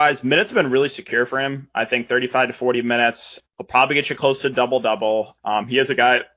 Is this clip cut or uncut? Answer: cut